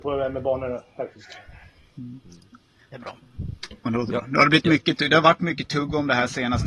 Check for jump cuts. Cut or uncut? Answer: uncut